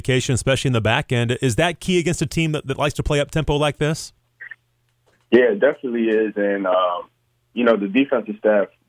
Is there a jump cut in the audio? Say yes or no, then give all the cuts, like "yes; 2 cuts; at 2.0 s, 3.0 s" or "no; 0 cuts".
no; 0 cuts